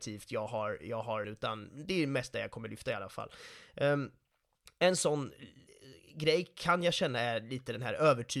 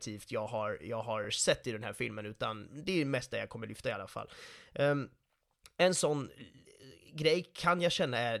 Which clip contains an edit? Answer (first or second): first